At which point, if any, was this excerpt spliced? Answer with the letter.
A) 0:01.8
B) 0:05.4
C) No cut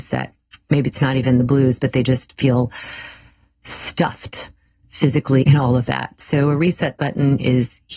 B